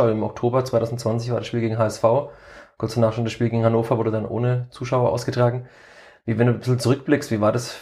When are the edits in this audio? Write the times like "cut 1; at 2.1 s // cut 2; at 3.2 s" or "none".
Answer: none